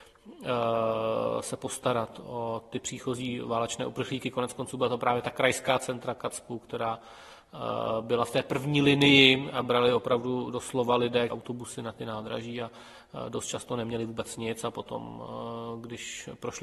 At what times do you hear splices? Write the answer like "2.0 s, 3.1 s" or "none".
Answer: 2.2 s, 11.3 s